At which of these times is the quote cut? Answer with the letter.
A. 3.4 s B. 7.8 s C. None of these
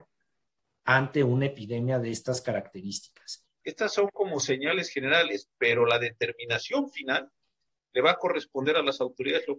A